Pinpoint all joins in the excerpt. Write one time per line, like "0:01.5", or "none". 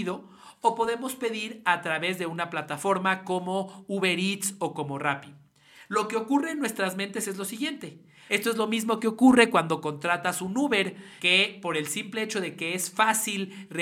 0:08.3
0:11.2

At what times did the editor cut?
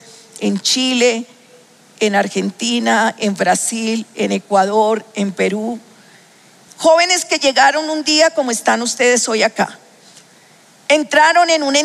0:06.7

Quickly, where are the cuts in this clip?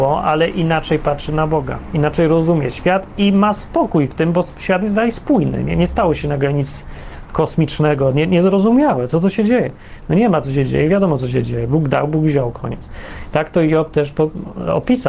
none

